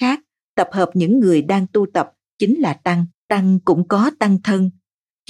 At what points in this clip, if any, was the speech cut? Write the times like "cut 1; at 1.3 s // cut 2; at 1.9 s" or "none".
cut 1; at 3.2 s